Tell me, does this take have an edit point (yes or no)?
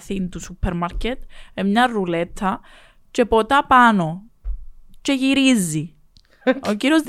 no